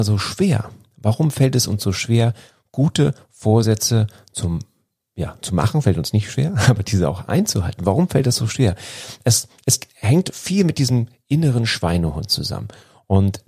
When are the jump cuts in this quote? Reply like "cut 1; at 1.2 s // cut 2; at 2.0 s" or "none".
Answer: none